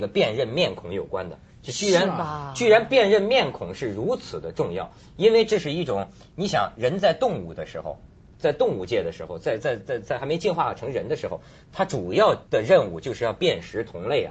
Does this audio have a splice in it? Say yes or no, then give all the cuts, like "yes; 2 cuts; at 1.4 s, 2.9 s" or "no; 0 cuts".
yes; 2 cuts; at 9.6 s, 12.4 s